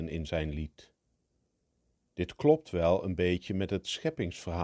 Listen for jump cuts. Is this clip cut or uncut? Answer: uncut